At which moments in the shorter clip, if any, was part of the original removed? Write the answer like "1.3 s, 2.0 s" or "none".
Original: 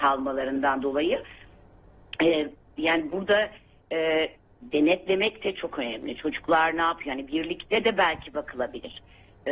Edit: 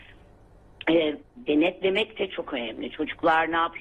1.3 s